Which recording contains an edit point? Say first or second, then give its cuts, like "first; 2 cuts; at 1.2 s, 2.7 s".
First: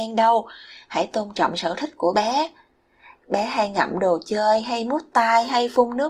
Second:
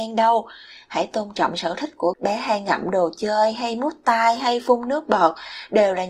second; 1 cut; at 2.1 s